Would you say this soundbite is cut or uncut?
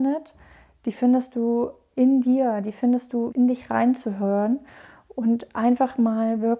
cut